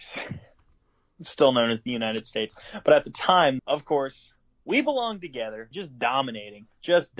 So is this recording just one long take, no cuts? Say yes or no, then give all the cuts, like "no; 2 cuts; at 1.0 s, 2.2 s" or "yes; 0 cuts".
no; 2 cuts; at 3.6 s, 5.7 s